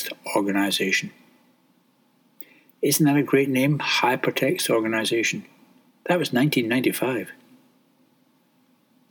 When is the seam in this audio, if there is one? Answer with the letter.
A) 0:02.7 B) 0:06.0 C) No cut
C